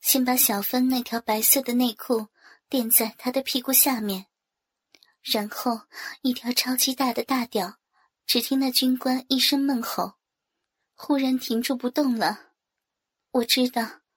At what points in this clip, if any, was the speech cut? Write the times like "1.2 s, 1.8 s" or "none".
8.1 s